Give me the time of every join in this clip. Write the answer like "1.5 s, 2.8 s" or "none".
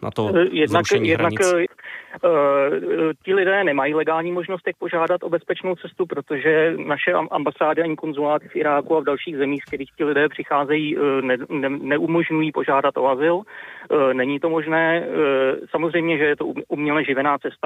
1.7 s